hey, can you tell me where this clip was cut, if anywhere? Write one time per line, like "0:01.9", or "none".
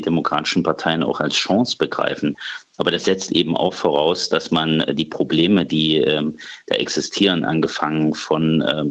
none

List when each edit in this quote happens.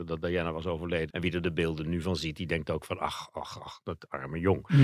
0:01.1

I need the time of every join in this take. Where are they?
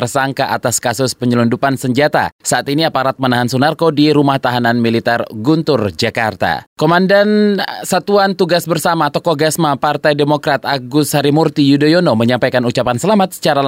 0:06.7

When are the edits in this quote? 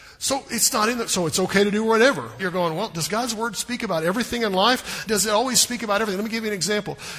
0:02.4
0:05.1

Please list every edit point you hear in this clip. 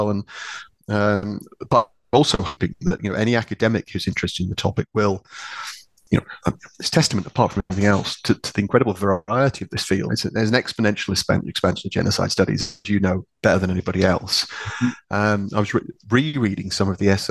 0:10.1

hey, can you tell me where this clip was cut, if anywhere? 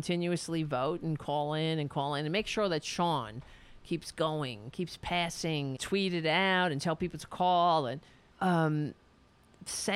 0:05.8
0:08.3

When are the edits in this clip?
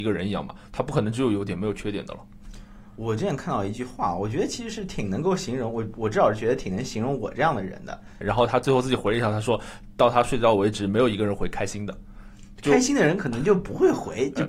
0:08.2

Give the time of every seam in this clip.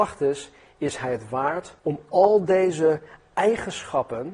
0:01.8

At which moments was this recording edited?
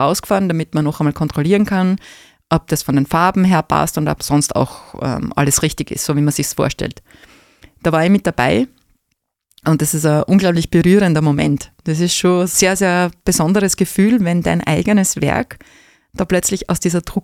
none

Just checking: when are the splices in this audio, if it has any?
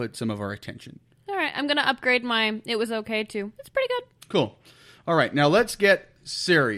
none

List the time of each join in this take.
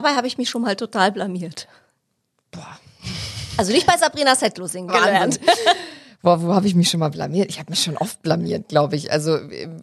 0:04.9

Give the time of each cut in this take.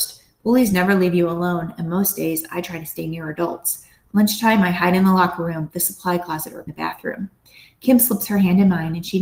0:06.7

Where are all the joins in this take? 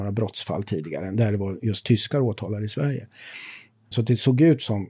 0:03.9

